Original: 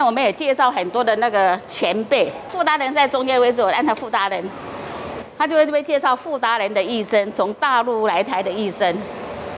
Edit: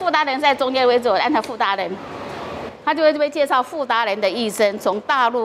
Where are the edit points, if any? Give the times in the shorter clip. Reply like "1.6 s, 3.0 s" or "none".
none